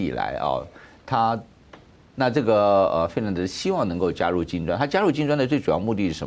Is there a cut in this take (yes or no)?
yes